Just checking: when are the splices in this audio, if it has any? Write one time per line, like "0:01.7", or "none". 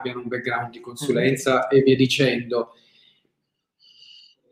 none